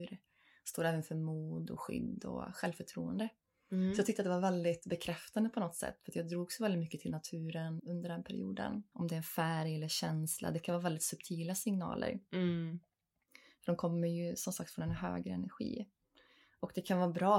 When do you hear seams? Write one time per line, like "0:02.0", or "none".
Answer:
0:07.8
0:08.9